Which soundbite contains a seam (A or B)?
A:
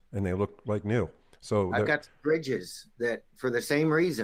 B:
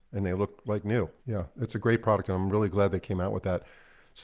B